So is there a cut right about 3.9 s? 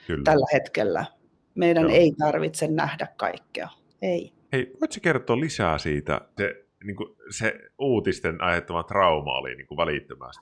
yes; 2 cuts; at 3.9 s, 6.4 s

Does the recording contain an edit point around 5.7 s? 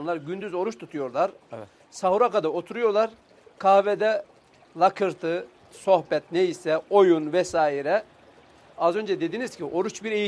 yes; 1 cut; at 5.7 s

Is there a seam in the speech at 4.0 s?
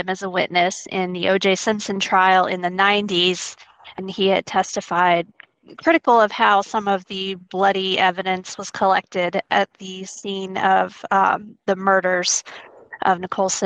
yes; 1 cut; at 4.0 s

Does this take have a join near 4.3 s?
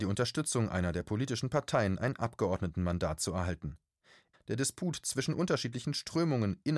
yes; 1 cut; at 4.3 s

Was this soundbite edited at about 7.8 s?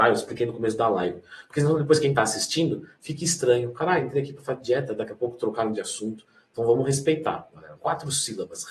yes; 1 cut; at 7.8 s

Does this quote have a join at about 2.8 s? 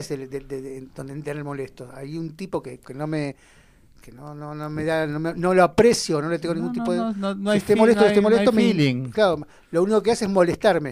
yes; 1 cut; at 2.8 s

